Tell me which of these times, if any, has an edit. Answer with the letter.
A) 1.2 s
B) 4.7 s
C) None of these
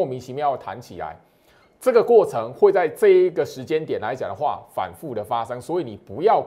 C